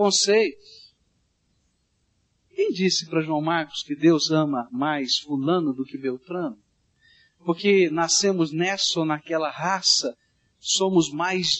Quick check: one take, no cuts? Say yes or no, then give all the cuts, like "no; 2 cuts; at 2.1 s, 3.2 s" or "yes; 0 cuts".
yes; 0 cuts